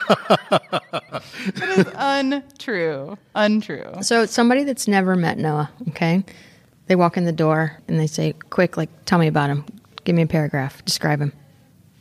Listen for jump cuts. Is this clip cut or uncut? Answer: uncut